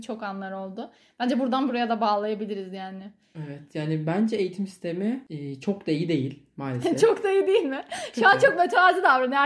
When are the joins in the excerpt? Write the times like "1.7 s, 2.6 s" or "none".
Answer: none